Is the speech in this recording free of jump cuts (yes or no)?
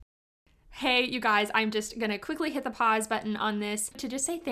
yes